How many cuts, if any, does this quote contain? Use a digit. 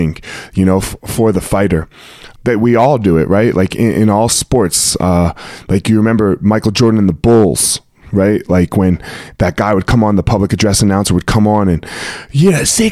1